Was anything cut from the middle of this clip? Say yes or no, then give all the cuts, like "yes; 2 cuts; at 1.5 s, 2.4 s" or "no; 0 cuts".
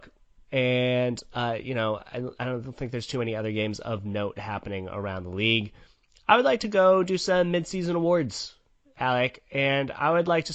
no; 0 cuts